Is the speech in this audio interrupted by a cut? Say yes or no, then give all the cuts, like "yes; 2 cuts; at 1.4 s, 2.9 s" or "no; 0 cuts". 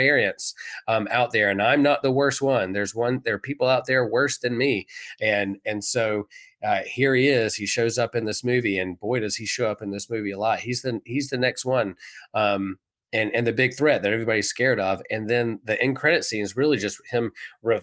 no; 0 cuts